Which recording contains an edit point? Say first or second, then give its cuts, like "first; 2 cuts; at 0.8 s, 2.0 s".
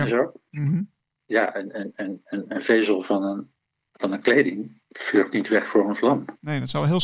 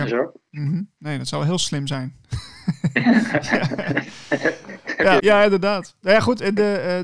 second; 2 cuts; at 1.0 s, 5.2 s